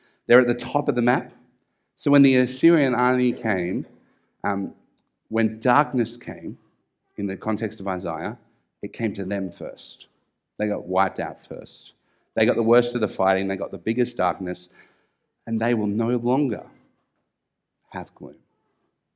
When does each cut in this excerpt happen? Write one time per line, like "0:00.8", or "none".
none